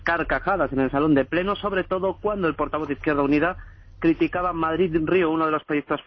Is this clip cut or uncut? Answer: uncut